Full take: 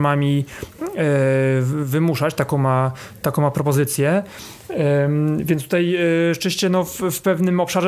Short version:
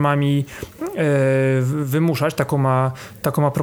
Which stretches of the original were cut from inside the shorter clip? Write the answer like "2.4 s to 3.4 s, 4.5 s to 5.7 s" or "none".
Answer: none

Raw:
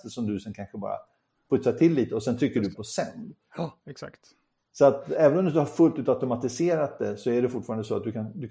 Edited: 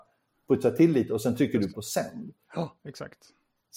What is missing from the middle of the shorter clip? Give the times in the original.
none

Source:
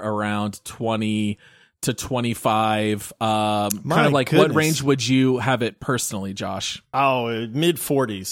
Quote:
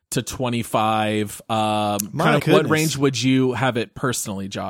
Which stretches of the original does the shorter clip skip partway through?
4.1 s to 4.2 s

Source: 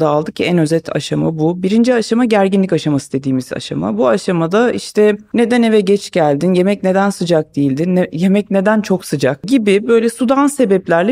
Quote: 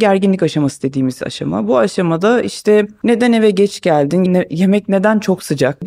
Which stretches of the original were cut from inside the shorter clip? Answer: 6.6 s to 7.9 s

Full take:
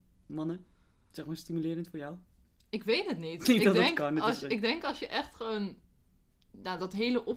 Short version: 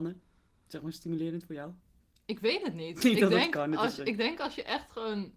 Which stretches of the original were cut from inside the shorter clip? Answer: none

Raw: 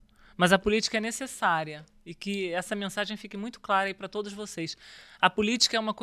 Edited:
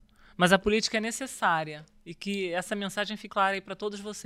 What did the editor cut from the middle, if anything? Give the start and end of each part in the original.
3.3 s to 3.6 s

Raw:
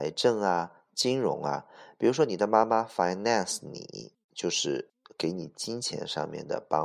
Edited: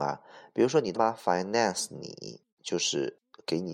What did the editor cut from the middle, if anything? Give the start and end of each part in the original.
2.4 s to 2.7 s

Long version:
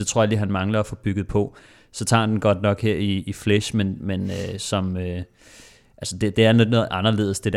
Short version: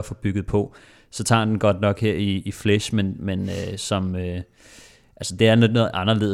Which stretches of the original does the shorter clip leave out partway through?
6.2 s to 6.3 s

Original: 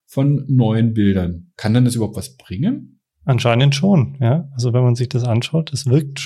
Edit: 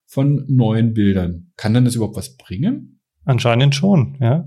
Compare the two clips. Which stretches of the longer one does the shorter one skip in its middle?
none

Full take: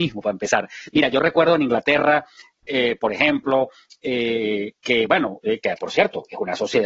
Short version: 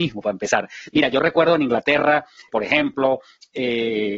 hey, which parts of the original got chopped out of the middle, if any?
2.5 s to 3.0 s

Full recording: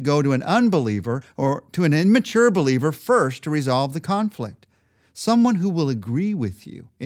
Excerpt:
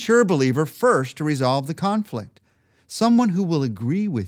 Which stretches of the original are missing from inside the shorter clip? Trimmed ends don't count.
none

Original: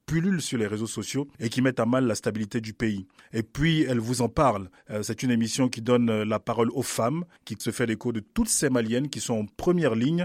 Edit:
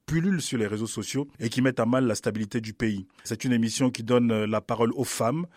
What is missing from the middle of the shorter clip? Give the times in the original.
3.2 s to 5.0 s

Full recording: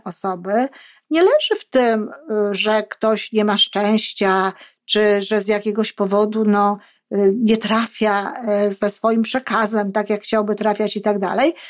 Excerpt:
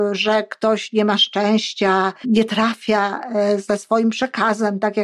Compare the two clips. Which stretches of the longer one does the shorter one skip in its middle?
4.6 s to 7.4 s

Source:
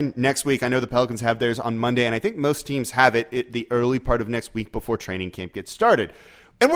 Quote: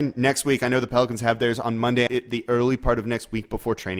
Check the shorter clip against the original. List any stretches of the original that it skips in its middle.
2.1 s to 3.3 s

